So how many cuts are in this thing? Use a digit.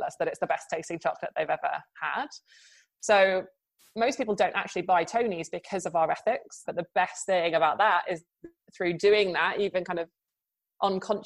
1